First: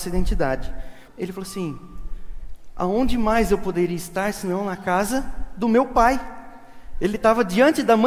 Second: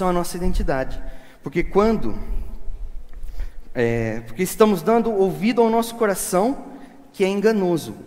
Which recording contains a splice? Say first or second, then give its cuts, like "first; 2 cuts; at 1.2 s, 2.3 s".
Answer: first; 1 cut; at 1.1 s